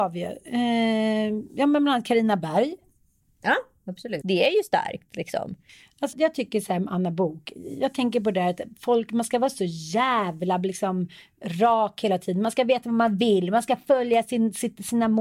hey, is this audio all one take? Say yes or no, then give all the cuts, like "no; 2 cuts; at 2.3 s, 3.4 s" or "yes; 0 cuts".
no; 2 cuts; at 4.2 s, 6.1 s